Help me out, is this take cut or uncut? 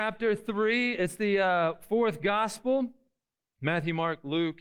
uncut